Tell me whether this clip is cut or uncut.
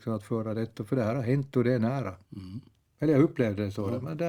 cut